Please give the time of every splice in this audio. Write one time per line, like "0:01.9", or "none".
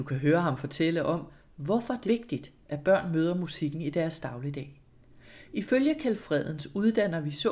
0:02.1